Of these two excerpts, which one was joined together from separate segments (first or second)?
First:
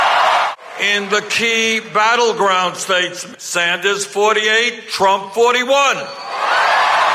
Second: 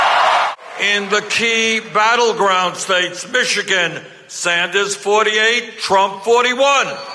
first